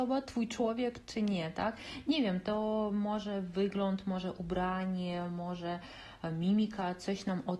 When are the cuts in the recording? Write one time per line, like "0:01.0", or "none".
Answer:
none